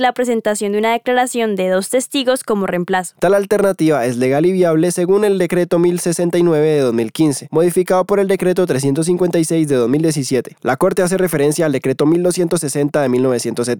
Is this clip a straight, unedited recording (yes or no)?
no